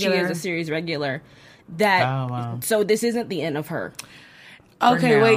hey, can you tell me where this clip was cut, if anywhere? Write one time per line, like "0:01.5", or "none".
none